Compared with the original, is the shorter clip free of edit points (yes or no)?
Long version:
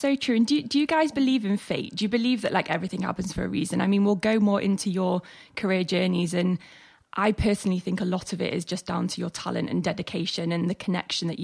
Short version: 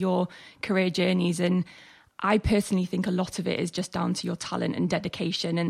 yes